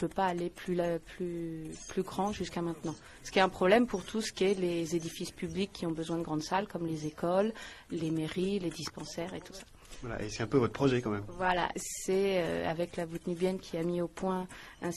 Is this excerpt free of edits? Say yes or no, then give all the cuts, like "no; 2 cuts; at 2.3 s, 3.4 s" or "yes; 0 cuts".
no; 1 cut; at 11.7 s